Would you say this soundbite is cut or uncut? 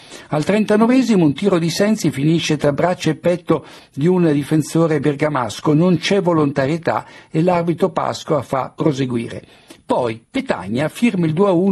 uncut